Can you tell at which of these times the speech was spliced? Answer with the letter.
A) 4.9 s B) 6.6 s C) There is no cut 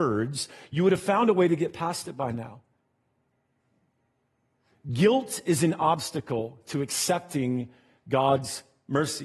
C